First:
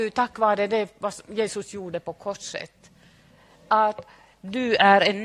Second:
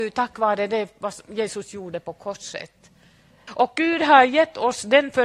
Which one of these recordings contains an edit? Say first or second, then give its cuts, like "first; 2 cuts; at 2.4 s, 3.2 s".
second; 1 cut; at 3.5 s